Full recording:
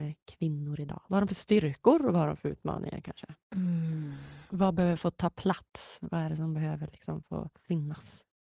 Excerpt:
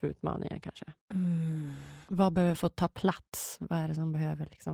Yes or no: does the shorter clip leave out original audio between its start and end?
no